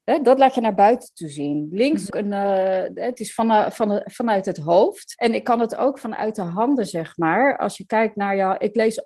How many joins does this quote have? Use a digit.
1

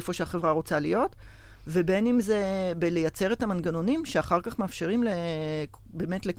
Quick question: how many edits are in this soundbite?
0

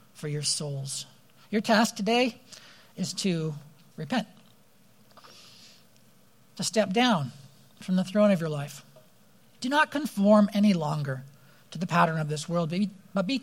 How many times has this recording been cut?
2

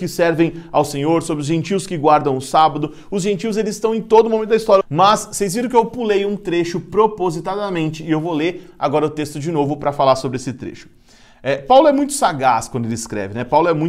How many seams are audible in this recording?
1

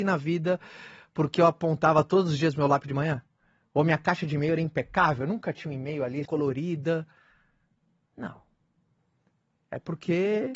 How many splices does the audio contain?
1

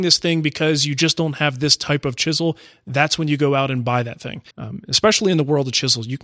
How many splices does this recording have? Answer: 1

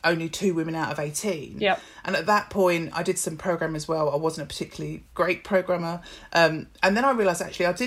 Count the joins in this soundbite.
0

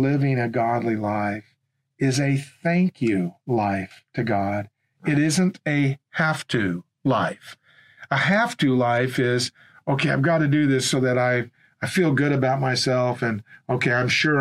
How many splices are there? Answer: 0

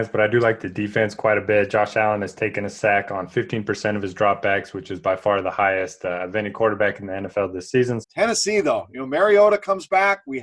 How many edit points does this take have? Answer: 1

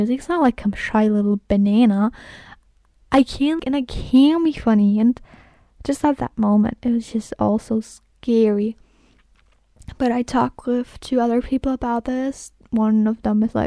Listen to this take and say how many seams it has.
1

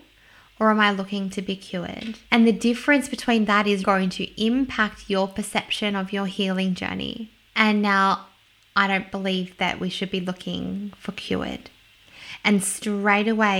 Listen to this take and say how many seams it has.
3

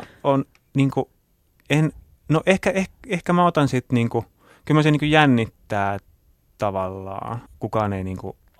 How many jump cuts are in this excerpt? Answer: 1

